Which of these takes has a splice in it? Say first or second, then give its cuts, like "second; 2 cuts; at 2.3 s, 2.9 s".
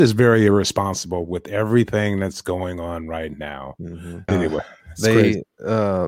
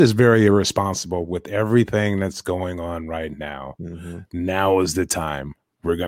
first; 1 cut; at 4.3 s